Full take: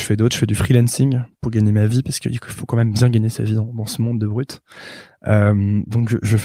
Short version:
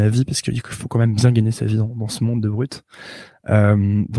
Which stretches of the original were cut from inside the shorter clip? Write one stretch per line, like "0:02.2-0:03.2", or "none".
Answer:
none